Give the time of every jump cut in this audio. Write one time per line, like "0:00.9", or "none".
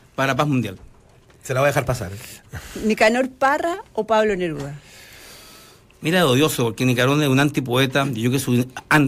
none